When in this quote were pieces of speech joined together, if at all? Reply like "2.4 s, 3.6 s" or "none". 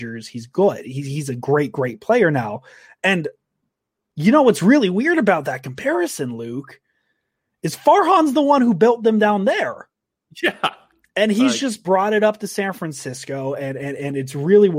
none